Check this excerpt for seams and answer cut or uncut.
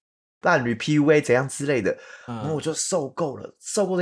uncut